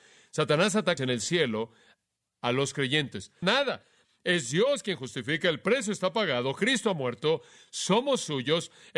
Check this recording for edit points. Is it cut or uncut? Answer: cut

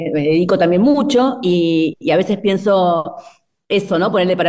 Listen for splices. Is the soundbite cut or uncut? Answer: uncut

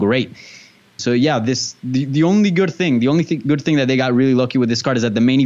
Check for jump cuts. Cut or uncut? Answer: cut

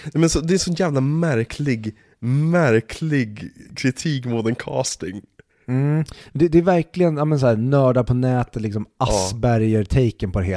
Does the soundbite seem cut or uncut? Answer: uncut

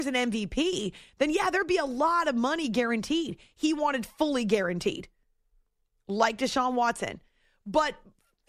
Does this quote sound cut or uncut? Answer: uncut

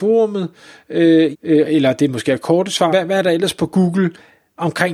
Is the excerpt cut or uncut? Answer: cut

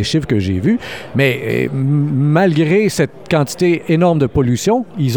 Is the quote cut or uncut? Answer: uncut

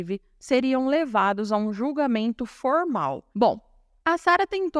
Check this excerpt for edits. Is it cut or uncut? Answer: cut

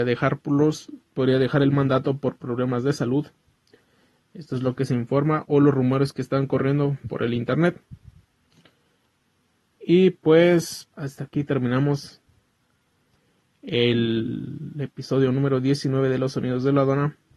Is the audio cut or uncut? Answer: cut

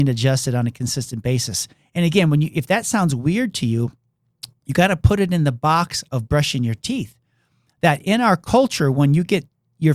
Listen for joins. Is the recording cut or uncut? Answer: uncut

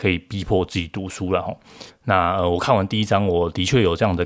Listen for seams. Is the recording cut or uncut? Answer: cut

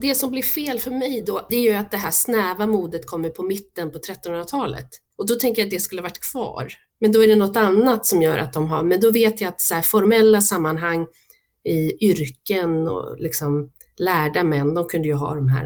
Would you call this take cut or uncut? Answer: cut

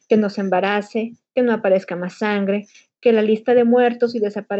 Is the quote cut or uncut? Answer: uncut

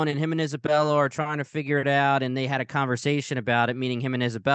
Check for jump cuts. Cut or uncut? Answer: uncut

